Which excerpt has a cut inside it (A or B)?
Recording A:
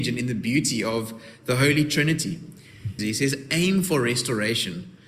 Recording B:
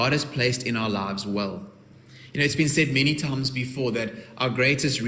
A